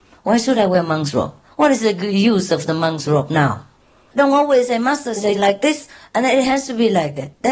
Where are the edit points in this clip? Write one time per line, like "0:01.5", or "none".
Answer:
0:04.1